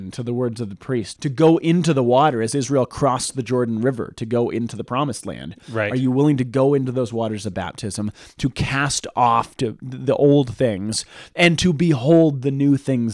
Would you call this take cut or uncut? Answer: cut